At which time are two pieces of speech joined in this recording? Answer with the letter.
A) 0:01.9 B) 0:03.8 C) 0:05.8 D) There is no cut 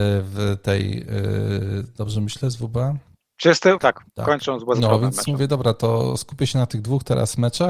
B